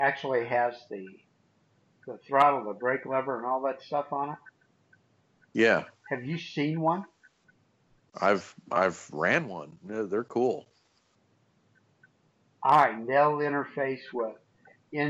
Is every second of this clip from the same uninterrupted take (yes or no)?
yes